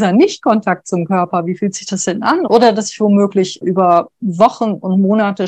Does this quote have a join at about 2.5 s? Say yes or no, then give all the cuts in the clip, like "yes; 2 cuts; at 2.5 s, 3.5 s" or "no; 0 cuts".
yes; 2 cuts; at 2.5 s, 3.6 s